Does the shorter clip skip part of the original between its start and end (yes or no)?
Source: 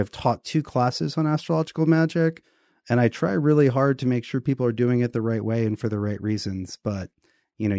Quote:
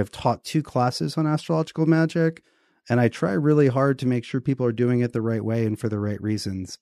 no